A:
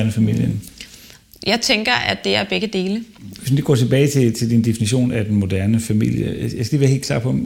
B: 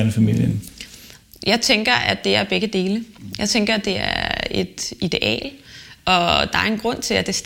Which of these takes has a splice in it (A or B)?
A